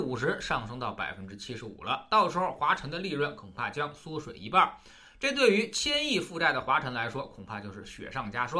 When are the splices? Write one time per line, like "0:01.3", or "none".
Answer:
none

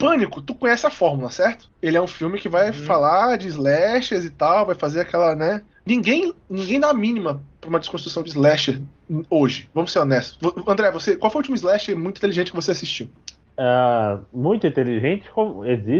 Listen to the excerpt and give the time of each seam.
0:05.8

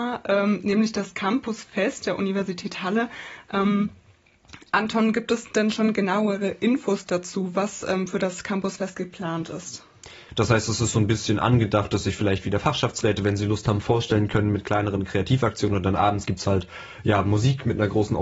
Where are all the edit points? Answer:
0:10.3

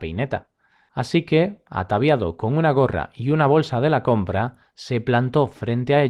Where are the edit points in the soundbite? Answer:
none

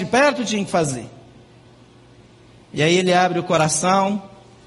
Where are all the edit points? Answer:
none

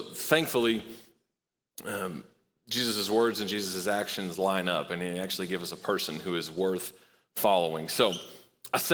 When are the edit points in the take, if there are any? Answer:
none

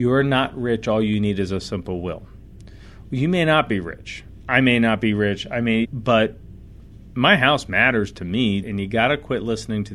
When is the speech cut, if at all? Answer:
0:05.8
0:08.6

